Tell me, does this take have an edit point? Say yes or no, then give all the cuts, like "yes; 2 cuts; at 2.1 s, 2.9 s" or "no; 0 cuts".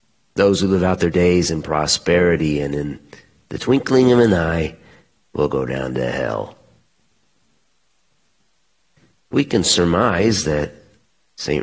no; 0 cuts